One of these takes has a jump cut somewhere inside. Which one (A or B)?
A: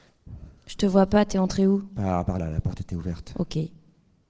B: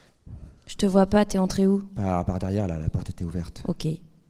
A